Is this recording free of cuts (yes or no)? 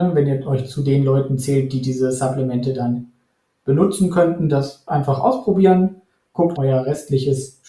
no